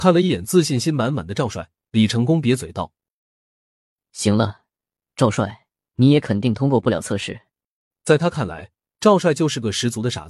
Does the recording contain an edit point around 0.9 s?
no; 2 cuts; at 5.8 s, 7.9 s

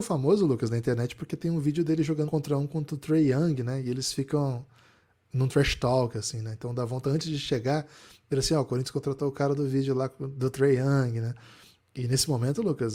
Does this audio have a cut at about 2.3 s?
yes; 1 cut; at 2.3 s

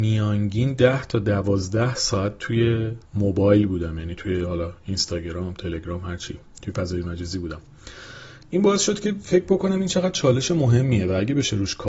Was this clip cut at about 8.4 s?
no; 1 cut; at 3.1 s

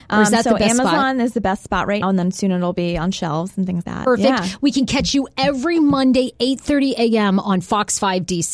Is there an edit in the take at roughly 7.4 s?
no; 2 cuts; at 2.0 s, 3.8 s

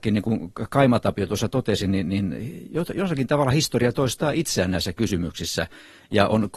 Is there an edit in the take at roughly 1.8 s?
no; 0 cuts

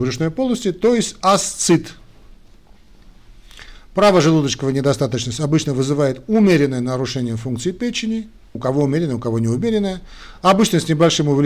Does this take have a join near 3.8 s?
no; 1 cut; at 8.6 s

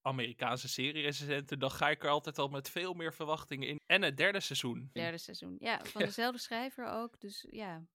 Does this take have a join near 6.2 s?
no; 2 cuts; at 3.8 s, 5.0 s

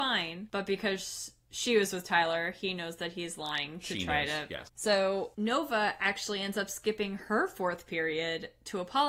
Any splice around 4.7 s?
yes; 1 cut; at 4.7 s

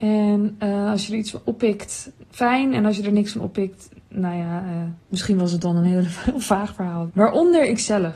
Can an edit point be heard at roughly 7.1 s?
yes; 1 cut; at 7.1 s

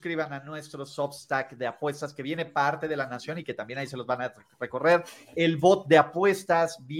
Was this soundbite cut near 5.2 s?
no; 0 cuts

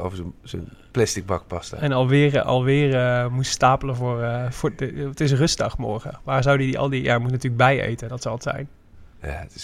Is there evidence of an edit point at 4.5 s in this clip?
no; 0 cuts

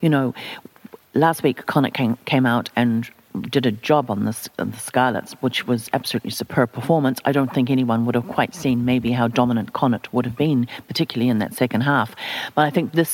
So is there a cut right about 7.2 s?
no; 0 cuts

